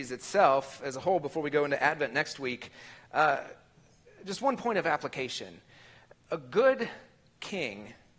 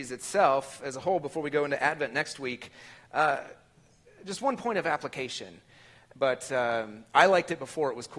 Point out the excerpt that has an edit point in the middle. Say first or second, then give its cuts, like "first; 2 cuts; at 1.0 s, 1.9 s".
second; 1 cut; at 6.1 s